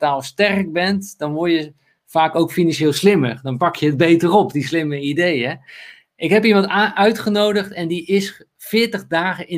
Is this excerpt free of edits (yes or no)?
yes